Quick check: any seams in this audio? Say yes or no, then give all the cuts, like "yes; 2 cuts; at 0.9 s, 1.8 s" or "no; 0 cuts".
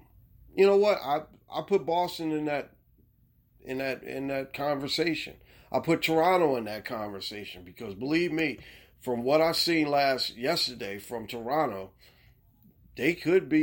no; 0 cuts